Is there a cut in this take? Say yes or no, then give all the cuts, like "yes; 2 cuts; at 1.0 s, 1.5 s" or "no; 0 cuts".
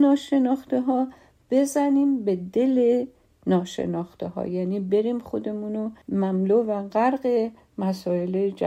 yes; 1 cut; at 6.0 s